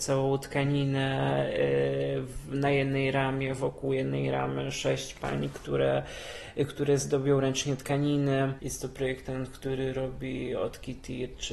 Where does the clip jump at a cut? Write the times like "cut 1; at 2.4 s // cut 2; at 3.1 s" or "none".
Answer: cut 1; at 8.6 s